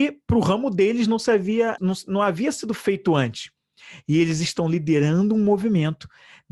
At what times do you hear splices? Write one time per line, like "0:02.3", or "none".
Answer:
0:01.8